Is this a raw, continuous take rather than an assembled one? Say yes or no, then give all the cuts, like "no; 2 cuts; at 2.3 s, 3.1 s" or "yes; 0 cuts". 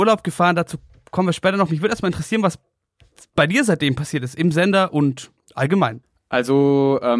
yes; 0 cuts